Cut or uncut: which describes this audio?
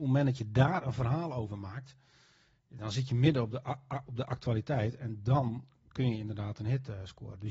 uncut